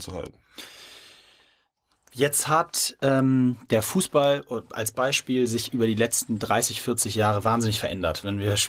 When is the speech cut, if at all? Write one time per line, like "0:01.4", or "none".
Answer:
none